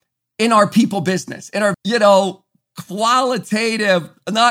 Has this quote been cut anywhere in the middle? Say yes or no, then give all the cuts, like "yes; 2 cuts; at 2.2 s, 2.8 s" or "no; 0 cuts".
yes; 1 cut; at 1.7 s